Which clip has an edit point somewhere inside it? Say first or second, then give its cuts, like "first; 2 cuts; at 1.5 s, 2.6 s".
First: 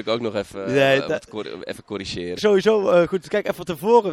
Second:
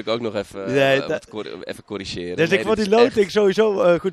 first; 1 cut; at 2.4 s